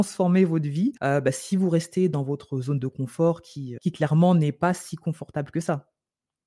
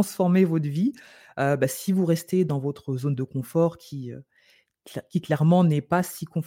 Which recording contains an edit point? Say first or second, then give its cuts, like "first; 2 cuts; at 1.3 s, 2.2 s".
first; 2 cuts; at 1.0 s, 3.8 s